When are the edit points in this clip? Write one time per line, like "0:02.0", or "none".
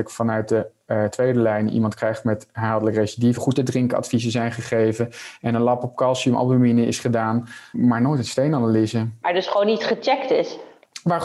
0:03.4
0:07.7